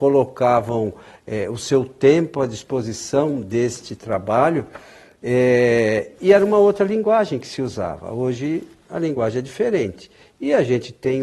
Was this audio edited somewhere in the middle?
no; 0 cuts

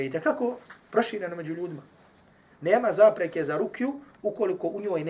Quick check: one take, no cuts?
no; 1 cut; at 2.5 s

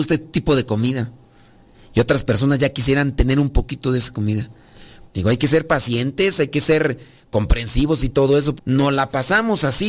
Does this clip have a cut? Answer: yes; 2 cuts; at 5.0 s, 8.6 s

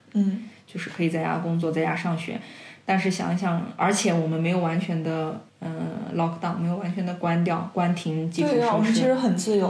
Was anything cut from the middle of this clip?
yes; 1 cut; at 5.5 s

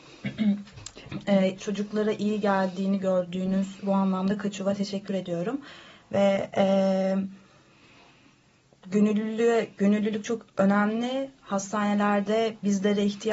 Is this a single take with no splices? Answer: no; 2 cuts; at 1.6 s, 3.8 s

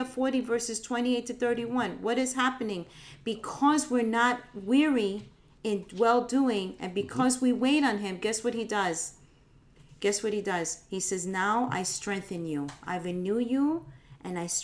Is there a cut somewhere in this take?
no; 0 cuts

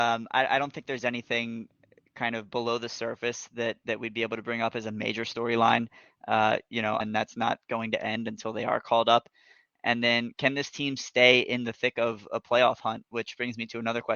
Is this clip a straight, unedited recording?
no; 1 cut; at 7.0 s

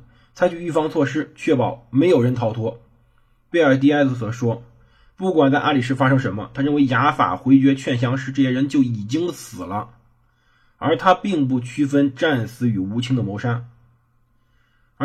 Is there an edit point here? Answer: no; 0 cuts

